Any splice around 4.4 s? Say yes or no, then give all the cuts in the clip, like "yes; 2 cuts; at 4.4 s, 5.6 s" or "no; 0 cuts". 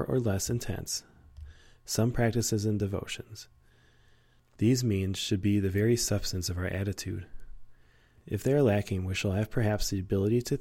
yes; 1 cut; at 4.4 s